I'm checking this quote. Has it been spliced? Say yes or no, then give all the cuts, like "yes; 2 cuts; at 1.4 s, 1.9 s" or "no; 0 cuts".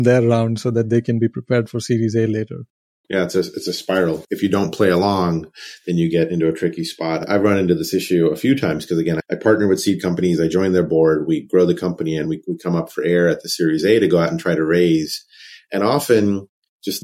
no; 0 cuts